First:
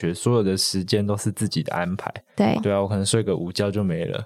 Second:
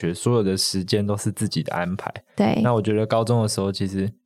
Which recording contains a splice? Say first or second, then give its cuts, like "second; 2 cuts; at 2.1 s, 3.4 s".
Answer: first; 1 cut; at 2.6 s